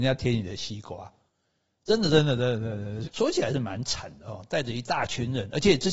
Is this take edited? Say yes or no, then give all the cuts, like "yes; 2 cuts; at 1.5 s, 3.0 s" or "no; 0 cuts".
yes; 1 cut; at 3.0 s